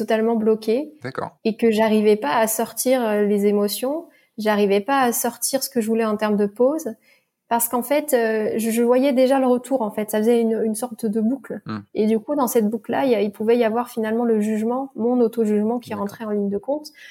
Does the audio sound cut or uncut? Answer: uncut